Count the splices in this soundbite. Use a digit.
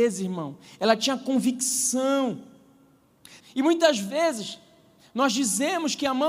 1